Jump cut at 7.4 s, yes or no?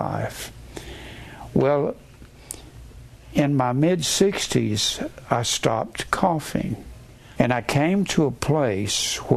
yes